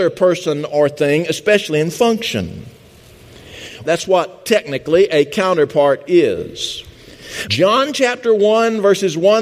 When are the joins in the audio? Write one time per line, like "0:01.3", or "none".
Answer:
0:03.8
0:07.5